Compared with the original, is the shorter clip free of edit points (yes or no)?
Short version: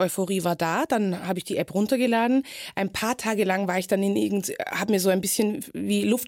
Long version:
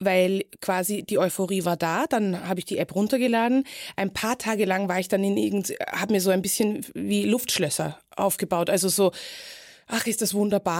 yes